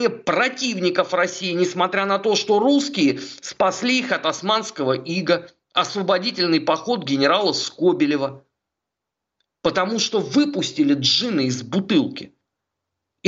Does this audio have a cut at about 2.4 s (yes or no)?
no